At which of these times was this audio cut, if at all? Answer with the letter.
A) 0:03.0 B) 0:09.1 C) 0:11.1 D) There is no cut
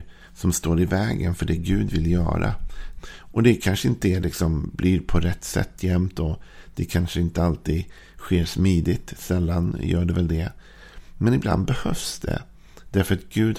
A